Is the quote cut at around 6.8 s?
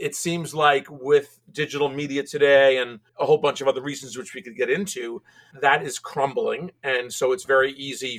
no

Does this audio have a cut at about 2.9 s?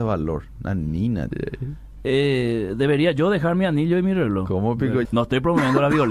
no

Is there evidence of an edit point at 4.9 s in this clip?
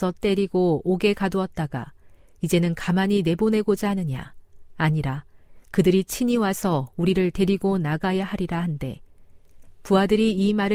no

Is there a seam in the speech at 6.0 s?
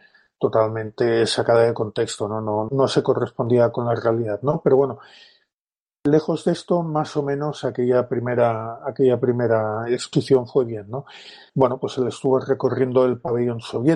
no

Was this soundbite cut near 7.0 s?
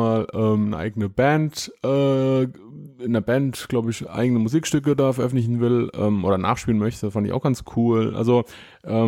no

